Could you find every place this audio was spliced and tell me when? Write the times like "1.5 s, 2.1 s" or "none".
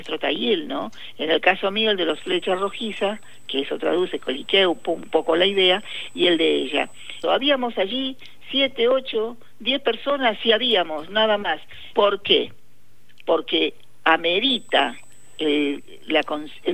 7.2 s, 11.9 s